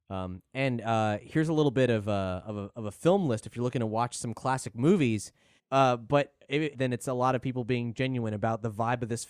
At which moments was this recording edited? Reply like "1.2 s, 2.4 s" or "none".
5.6 s, 6.7 s